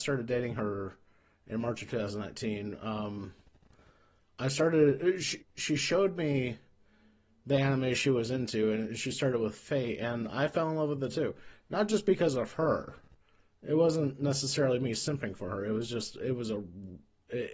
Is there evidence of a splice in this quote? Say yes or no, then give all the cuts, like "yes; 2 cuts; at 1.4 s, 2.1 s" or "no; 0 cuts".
yes; 1 cut; at 5.4 s